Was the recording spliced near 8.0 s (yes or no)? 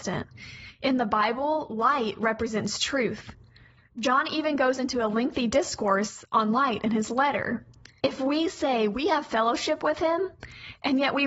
yes